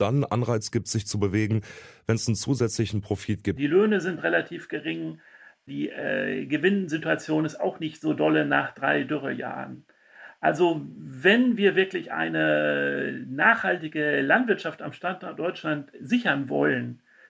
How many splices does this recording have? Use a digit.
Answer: 1